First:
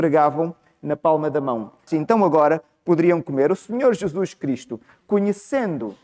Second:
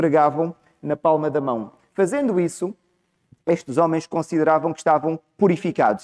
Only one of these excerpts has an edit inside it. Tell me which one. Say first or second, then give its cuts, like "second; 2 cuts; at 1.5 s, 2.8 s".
first; 1 cut; at 1.9 s